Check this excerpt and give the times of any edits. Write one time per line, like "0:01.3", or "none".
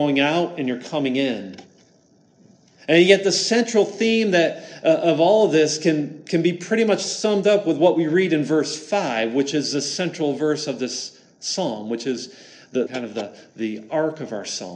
0:12.9